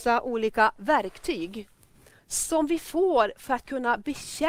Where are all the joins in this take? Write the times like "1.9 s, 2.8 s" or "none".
2.2 s